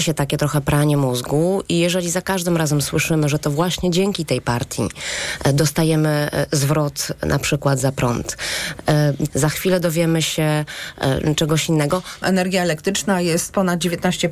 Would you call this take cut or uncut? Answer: cut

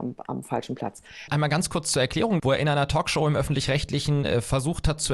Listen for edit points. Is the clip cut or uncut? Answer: cut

